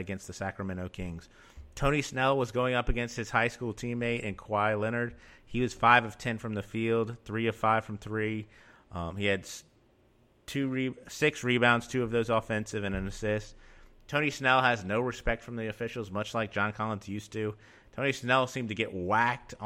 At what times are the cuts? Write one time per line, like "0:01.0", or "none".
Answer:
none